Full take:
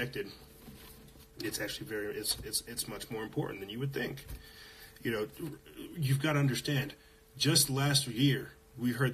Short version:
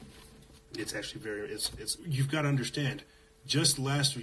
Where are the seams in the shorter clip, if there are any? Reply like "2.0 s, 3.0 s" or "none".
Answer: 2.0 s